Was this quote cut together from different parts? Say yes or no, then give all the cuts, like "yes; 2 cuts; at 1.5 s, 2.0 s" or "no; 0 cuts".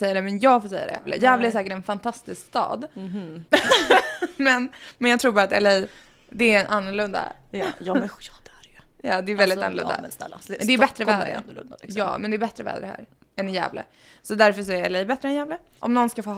no; 0 cuts